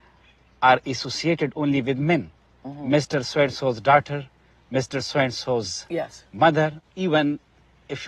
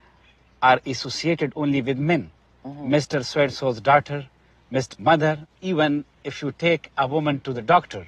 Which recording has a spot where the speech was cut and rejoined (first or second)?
second